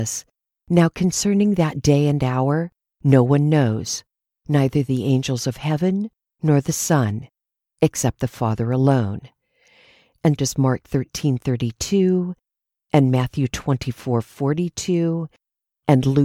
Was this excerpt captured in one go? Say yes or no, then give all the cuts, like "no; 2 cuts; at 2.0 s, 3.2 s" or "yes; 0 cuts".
no; 1 cut; at 10.4 s